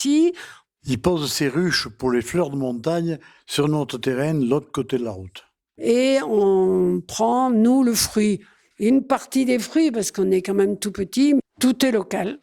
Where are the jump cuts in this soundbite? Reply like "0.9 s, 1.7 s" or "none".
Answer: 5.8 s, 11.4 s